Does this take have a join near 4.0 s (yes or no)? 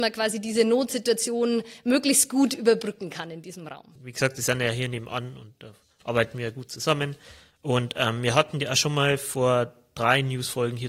yes